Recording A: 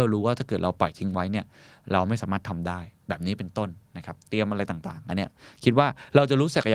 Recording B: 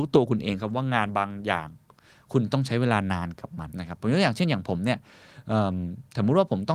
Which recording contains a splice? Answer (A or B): B